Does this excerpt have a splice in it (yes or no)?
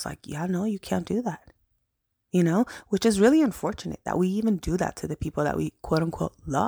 no